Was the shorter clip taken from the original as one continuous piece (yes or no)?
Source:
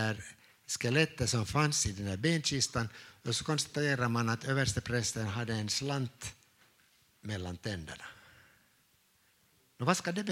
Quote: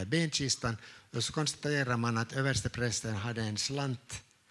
yes